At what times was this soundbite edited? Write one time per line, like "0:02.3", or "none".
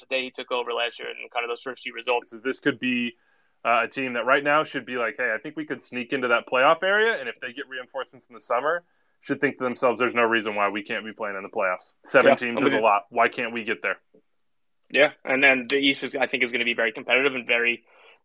0:02.2
0:12.0